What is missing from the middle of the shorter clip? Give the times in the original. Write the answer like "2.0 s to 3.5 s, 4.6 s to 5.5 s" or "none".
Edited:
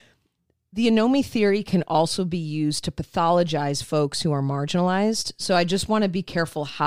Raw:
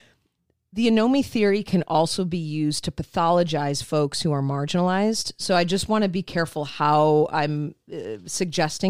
none